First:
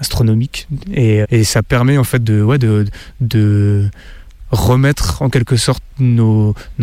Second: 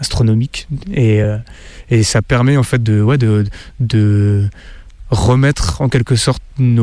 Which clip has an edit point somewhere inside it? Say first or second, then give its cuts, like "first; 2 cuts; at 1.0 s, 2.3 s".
first; 1 cut; at 1.2 s